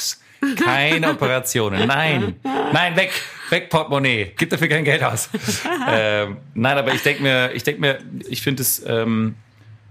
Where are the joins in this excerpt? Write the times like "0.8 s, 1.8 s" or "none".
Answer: 4.4 s, 8.2 s

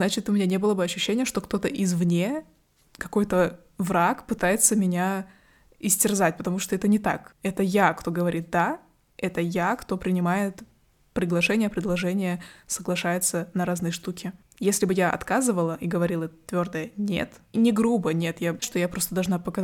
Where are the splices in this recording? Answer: 17.5 s, 18.6 s

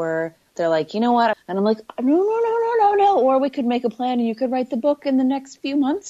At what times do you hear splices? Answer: 1.3 s

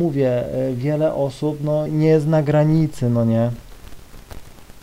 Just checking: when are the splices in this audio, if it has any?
1.9 s

